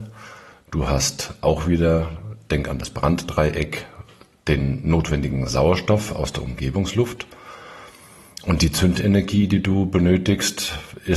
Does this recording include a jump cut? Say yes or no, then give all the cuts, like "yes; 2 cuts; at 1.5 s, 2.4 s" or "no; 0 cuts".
no; 0 cuts